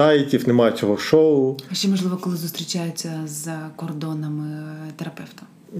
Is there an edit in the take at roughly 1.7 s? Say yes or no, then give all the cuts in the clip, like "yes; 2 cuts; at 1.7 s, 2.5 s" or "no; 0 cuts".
no; 0 cuts